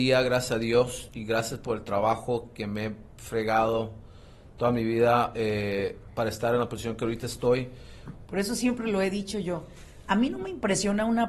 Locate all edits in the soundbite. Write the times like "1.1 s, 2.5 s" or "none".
8.3 s